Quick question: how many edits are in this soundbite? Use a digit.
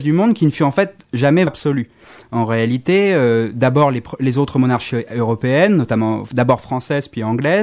1